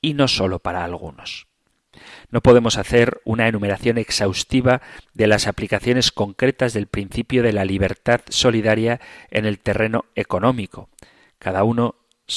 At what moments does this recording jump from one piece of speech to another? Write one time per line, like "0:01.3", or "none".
none